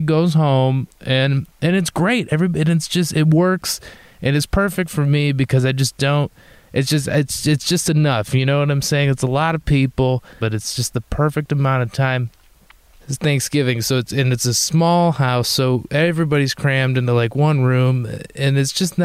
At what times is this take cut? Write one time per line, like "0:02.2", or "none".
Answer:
0:10.4
0:13.0